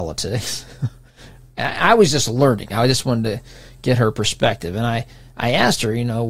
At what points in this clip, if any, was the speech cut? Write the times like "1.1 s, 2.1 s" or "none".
none